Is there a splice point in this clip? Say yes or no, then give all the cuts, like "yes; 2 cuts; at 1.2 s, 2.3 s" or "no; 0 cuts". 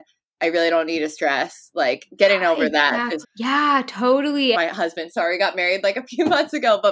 yes; 2 cuts; at 3.2 s, 4.5 s